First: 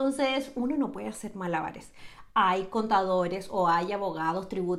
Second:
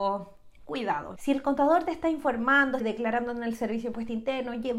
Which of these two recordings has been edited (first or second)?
second